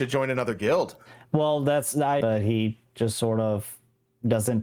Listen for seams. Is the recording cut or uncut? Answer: cut